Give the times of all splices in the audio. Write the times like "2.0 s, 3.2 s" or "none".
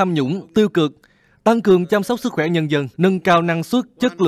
2.9 s